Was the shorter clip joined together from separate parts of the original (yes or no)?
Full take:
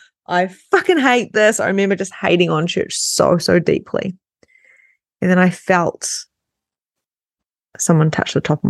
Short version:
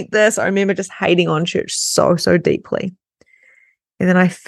no